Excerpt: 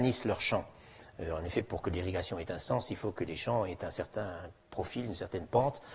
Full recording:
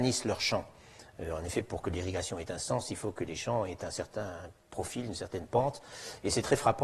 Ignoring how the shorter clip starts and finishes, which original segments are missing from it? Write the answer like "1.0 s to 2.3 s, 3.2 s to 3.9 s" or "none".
none